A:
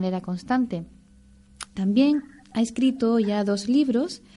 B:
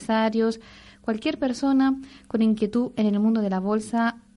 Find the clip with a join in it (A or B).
A